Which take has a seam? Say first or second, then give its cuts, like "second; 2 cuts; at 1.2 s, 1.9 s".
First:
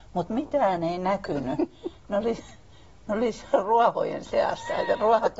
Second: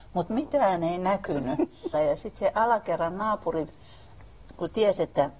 second; 1 cut; at 1.9 s